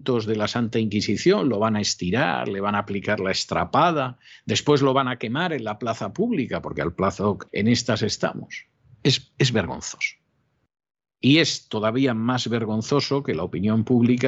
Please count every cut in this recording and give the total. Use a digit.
1